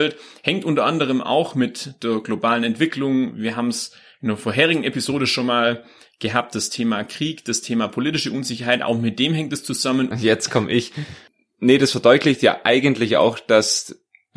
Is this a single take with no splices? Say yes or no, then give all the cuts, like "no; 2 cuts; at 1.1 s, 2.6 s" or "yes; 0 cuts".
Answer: no; 1 cut; at 10.1 s